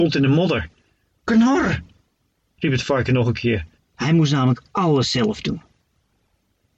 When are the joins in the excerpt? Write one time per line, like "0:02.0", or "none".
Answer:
0:03.8

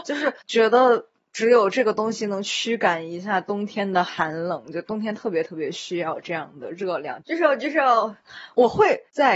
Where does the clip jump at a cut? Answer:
0:07.2

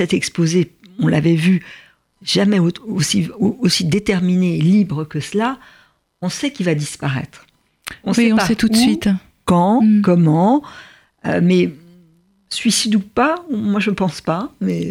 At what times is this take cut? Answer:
none

